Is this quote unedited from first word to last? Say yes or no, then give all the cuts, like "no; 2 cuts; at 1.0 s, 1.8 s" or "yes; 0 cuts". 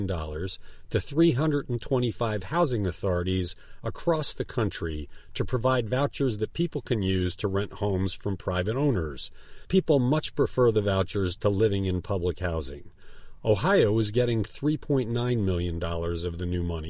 yes; 0 cuts